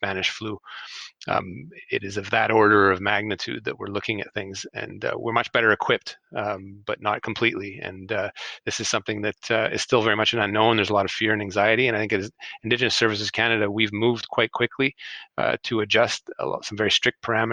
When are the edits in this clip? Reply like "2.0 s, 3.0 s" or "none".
none